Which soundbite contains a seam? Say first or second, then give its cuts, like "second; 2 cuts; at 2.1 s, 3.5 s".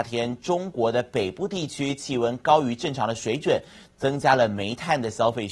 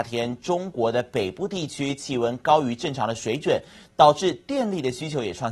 first; 1 cut; at 3.9 s